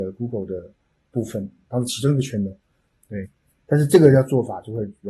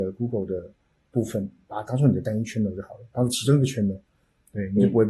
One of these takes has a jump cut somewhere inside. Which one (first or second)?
first